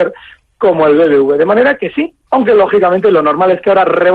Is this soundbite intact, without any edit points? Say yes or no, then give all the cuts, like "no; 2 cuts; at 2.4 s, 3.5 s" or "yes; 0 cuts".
no; 1 cut; at 2.3 s